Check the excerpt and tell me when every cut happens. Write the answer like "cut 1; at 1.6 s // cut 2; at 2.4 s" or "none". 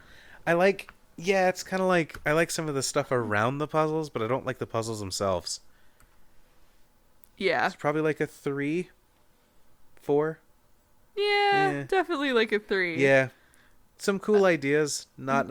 none